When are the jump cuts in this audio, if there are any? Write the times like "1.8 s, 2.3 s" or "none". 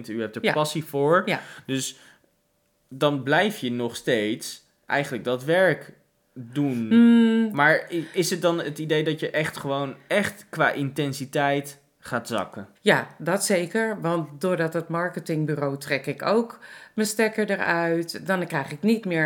12.8 s

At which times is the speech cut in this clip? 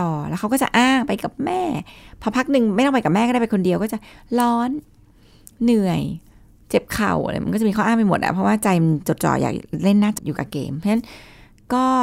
10.2 s

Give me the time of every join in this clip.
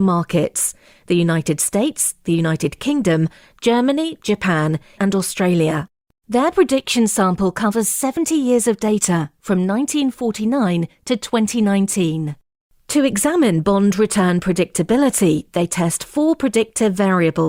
5.0 s

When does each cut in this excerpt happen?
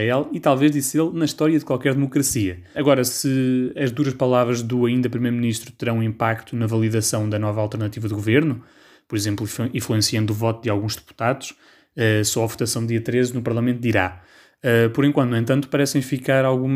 2.7 s

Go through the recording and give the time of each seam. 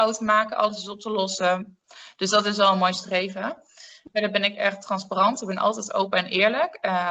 none

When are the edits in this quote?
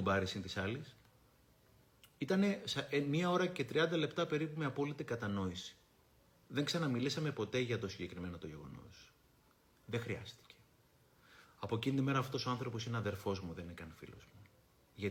none

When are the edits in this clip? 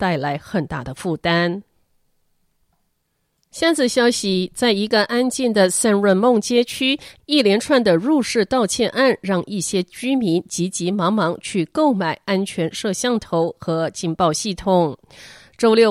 none

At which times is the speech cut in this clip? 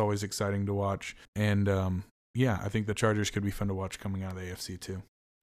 1.3 s

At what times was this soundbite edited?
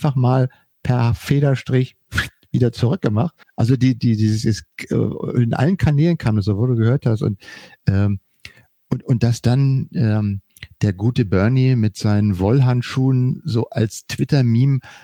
3.4 s

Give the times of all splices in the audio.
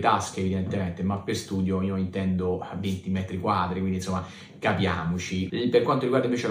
5.5 s

